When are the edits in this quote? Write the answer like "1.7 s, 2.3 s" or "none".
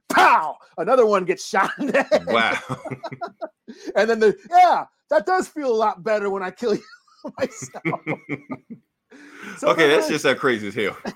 4.5 s